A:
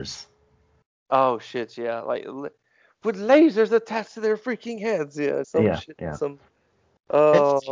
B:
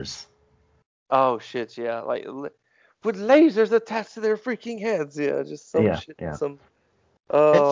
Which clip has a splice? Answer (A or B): A